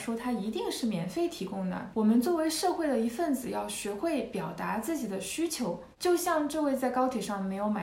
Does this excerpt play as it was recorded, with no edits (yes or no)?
no